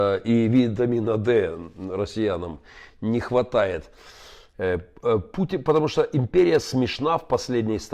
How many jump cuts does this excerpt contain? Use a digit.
1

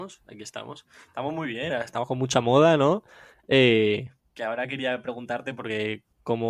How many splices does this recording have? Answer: 0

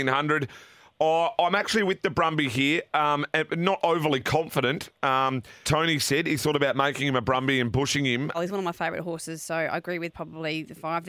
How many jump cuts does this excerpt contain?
2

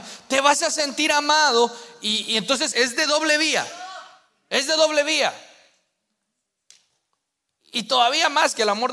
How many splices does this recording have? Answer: 1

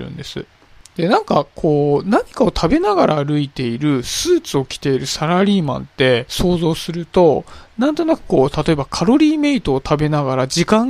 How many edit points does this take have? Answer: 0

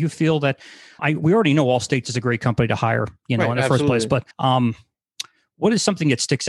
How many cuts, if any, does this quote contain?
2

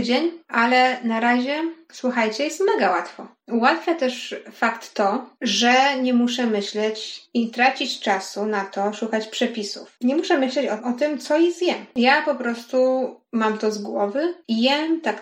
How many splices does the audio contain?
1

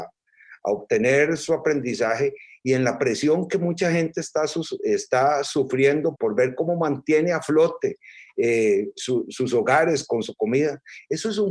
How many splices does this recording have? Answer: 1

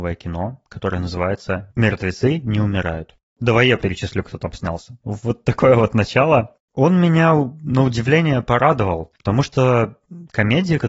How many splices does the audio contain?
2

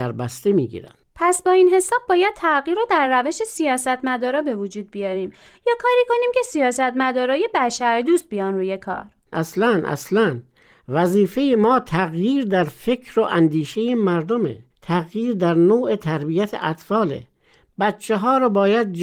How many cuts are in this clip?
2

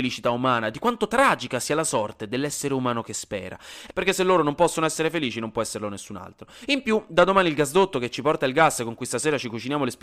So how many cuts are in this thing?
1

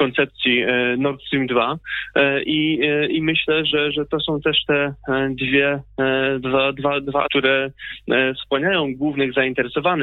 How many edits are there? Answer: 1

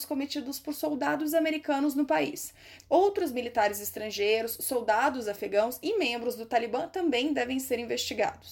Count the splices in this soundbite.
1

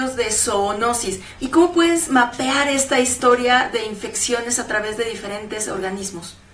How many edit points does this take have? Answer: 1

